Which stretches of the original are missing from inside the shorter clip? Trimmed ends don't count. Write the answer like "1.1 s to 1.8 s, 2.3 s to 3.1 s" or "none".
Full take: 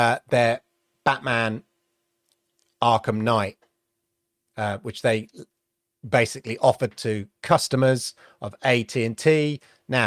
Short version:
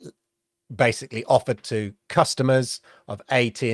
none